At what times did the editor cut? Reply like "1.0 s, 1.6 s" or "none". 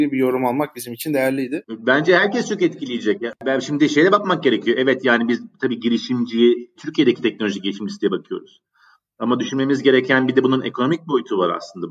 6.8 s